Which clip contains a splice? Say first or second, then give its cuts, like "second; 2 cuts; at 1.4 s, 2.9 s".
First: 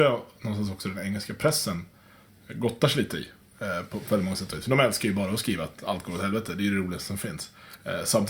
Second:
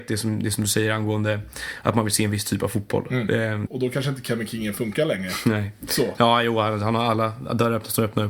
second; 1 cut; at 3.7 s